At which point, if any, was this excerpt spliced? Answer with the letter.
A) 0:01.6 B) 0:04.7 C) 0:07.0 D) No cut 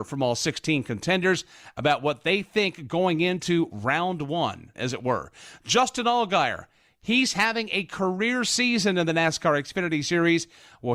B